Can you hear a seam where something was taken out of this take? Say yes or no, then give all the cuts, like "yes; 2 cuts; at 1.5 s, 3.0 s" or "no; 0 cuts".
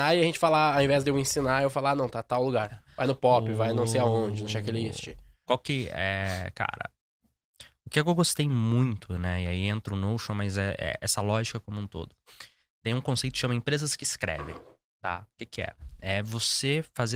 no; 0 cuts